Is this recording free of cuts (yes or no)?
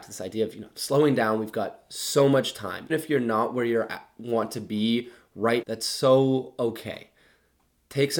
no